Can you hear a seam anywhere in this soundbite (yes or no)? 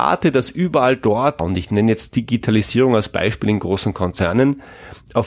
yes